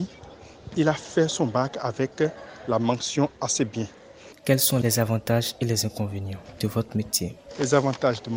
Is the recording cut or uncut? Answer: cut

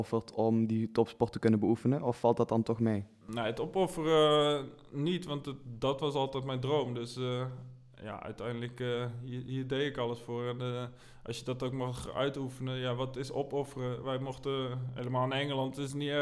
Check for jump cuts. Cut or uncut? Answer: uncut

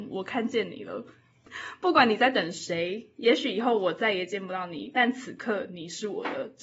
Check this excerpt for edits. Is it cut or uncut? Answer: uncut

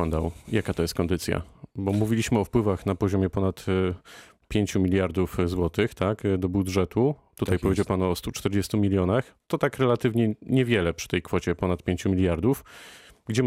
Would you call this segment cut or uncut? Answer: uncut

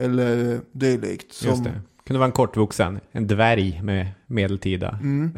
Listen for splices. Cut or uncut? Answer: uncut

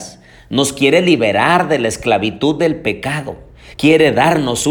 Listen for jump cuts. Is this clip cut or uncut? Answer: cut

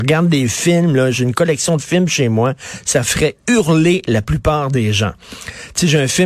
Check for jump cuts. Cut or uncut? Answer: uncut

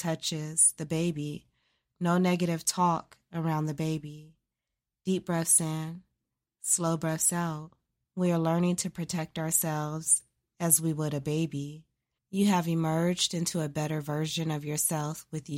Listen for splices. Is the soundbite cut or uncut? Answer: cut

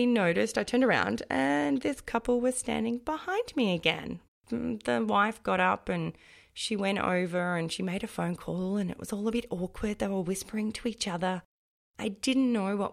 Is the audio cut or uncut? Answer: cut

